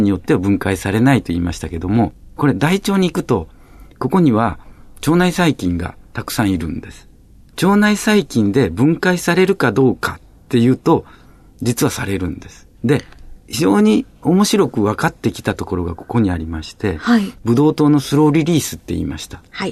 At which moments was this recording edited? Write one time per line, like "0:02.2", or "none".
0:12.7
0:17.3